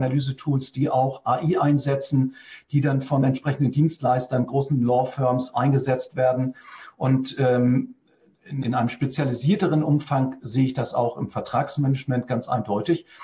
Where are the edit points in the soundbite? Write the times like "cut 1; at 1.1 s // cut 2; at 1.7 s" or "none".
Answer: cut 1; at 8.6 s